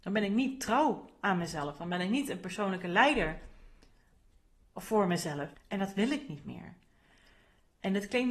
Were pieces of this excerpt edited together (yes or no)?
yes